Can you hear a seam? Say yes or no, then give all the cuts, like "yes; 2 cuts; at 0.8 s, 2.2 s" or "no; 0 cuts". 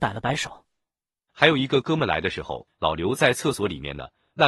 yes; 2 cuts; at 1.3 s, 2.7 s